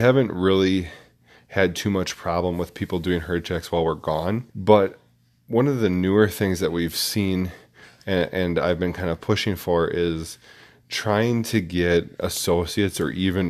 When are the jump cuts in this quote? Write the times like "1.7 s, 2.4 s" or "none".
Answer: 4.5 s